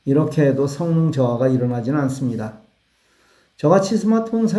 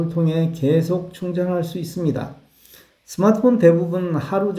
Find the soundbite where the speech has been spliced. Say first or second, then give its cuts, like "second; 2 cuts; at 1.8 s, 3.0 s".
second; 1 cut; at 2.9 s